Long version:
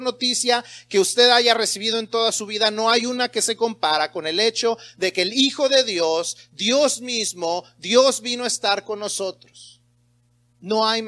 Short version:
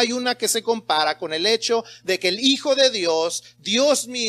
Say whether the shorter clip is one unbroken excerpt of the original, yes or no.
yes